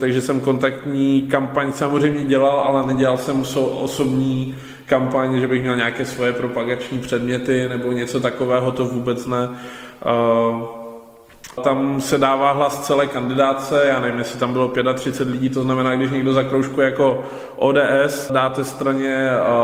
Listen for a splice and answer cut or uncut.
cut